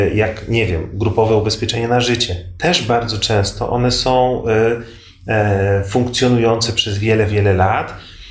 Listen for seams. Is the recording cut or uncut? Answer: uncut